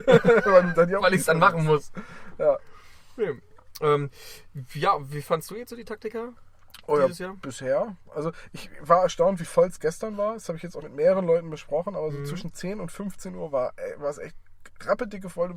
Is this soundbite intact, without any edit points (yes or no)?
no